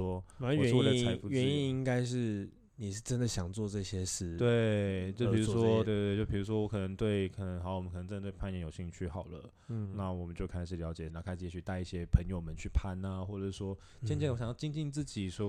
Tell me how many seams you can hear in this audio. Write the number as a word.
two